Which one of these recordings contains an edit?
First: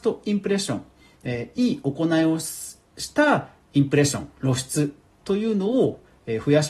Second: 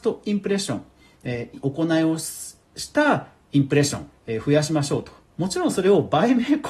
second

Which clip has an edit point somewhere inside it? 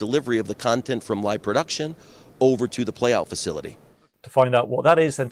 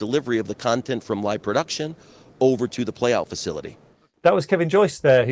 first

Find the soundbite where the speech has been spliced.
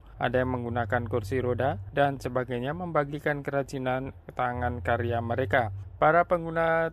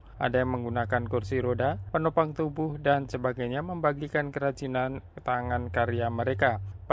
first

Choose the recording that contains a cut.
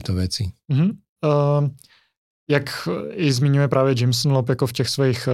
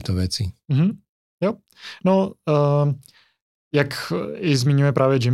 first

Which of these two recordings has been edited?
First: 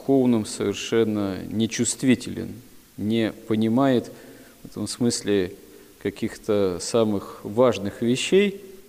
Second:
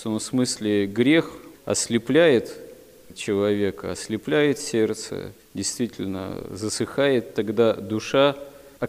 second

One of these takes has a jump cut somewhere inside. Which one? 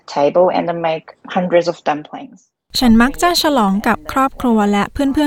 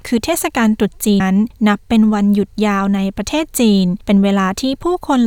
second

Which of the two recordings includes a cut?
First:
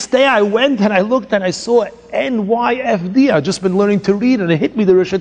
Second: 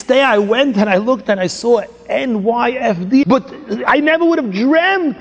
second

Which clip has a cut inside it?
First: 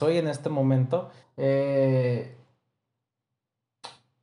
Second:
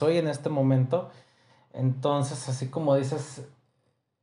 first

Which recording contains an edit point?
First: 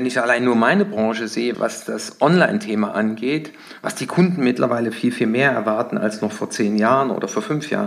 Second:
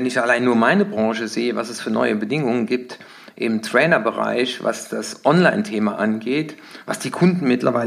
first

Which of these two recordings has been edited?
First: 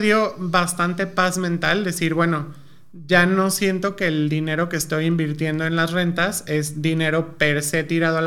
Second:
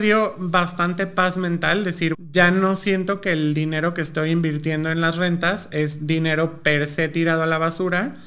second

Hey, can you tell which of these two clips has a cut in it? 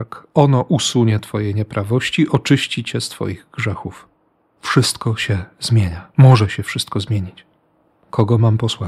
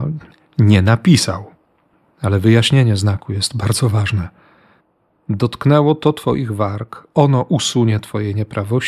first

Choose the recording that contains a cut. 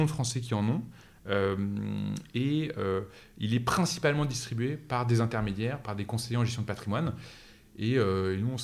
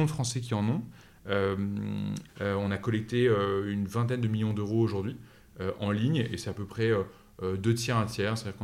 second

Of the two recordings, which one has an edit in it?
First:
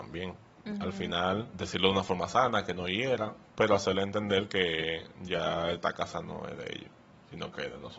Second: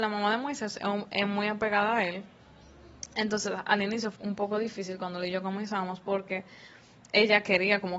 second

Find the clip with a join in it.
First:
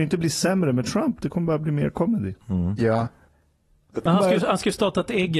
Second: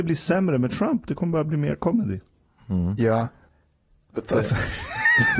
first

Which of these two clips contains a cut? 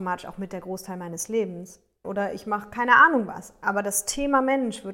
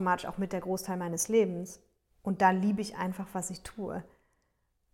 first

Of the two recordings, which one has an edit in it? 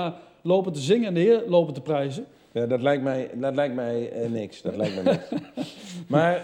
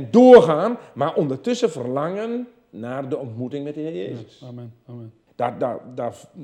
second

